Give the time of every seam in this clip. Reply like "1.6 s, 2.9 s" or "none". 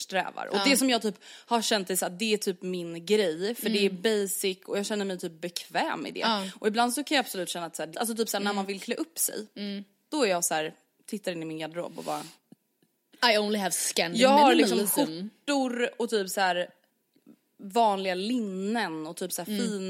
7.9 s